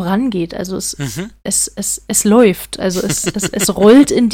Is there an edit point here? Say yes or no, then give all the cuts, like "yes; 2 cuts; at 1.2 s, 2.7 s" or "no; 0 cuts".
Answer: no; 0 cuts